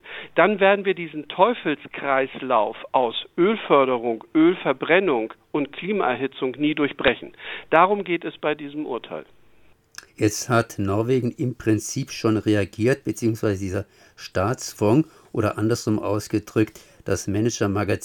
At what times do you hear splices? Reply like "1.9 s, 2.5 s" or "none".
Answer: 10.1 s